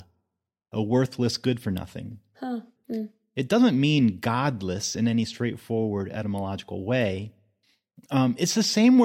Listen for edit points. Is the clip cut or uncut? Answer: cut